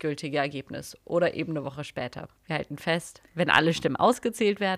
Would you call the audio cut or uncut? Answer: cut